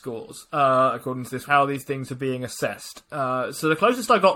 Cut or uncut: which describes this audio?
cut